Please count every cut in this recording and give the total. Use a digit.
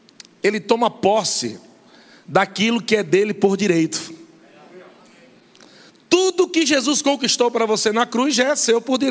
0